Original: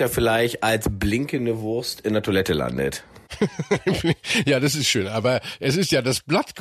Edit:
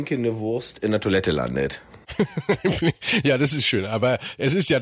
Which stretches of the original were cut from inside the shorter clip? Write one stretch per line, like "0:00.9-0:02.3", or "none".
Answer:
none